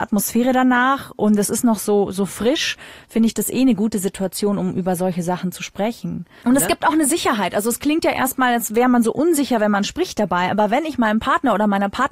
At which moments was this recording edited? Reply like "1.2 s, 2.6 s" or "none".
6.4 s